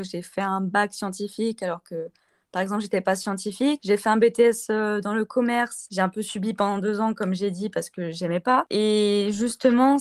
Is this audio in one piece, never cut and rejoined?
yes; 0 cuts

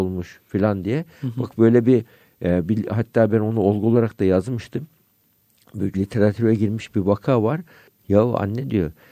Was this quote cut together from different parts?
yes; 1 cut; at 5.9 s

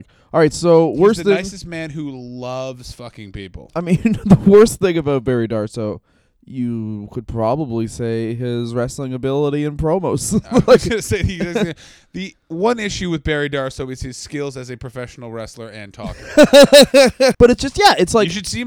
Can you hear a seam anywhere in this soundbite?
yes; 1 cut; at 17.3 s

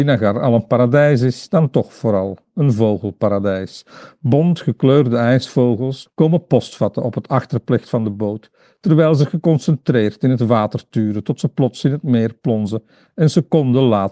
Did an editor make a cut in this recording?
yes; 1 cut; at 6.1 s

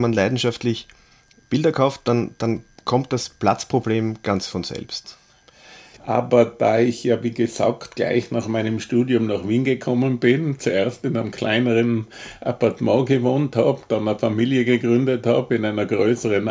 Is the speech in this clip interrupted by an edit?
yes; 1 cut; at 6.0 s

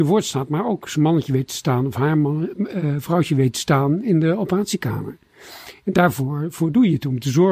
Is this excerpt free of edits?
yes; 0 cuts

